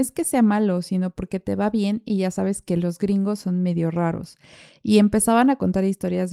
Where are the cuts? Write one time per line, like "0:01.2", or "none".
none